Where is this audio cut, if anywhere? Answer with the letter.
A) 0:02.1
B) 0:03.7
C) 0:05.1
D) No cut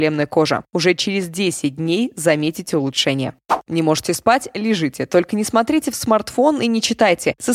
B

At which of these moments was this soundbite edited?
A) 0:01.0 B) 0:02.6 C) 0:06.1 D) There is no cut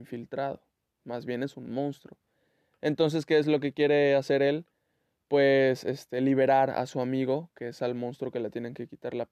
A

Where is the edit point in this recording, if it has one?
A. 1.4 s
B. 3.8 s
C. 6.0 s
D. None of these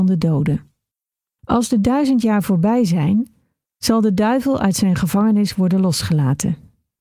A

